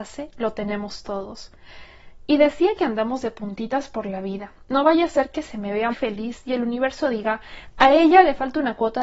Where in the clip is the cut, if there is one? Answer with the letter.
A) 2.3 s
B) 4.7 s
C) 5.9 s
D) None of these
C